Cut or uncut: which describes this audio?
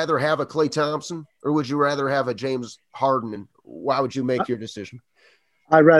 uncut